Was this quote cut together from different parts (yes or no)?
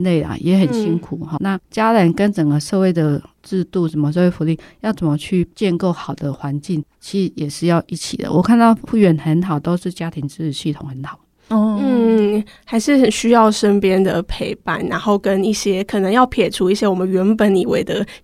yes